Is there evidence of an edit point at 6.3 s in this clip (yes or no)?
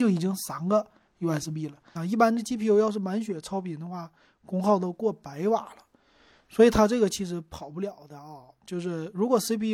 no